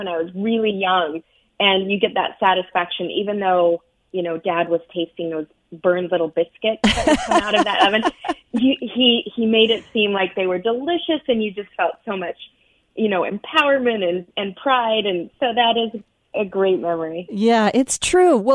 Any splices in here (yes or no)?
no